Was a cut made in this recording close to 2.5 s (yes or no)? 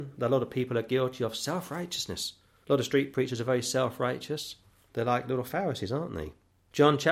no